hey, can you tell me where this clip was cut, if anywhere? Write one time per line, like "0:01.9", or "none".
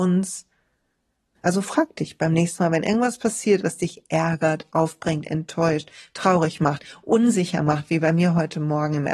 0:01.4